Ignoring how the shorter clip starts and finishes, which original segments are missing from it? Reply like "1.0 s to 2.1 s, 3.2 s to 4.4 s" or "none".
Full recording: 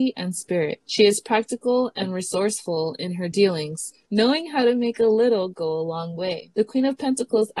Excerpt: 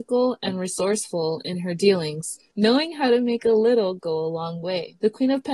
none